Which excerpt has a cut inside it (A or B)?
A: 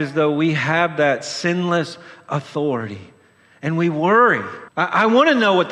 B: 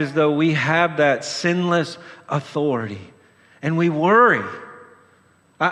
A